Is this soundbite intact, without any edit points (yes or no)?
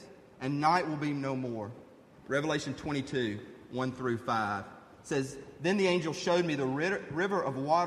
no